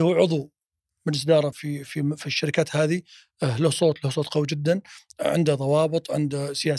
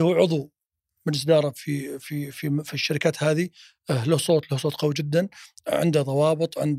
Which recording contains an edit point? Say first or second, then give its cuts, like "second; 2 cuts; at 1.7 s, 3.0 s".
first; 1 cut; at 1.5 s